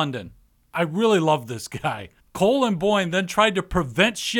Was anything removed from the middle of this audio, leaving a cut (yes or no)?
yes